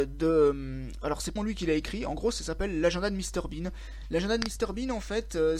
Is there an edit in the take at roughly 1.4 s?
yes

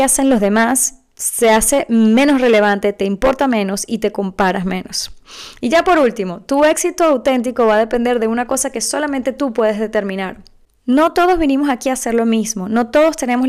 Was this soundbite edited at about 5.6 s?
no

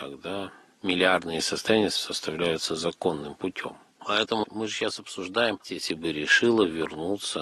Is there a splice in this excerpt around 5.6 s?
yes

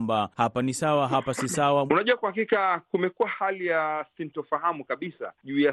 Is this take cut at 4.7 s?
no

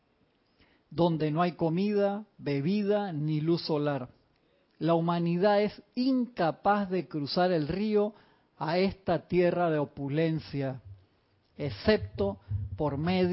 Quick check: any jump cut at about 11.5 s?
no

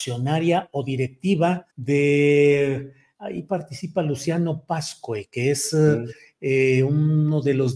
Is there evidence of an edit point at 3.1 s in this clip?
no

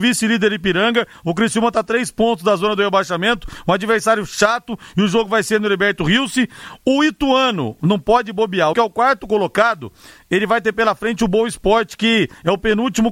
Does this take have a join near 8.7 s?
yes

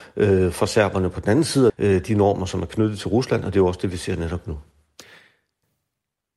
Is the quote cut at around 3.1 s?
no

